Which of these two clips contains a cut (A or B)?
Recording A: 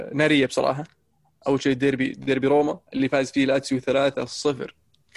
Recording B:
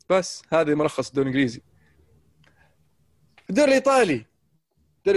A